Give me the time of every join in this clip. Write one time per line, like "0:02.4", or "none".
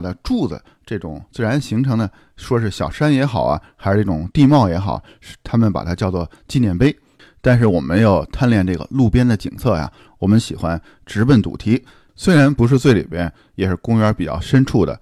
0:12.1